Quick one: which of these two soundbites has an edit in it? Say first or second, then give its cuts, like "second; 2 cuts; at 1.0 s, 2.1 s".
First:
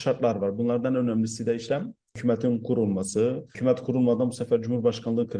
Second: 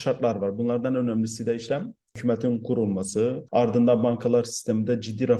second; 1 cut; at 3.5 s